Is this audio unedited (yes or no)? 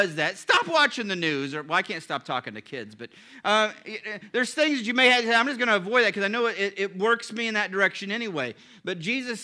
yes